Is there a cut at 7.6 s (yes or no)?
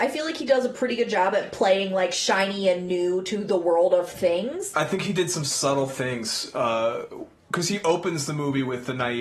no